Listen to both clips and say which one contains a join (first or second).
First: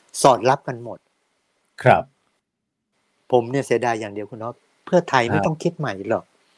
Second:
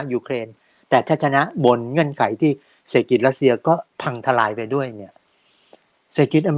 second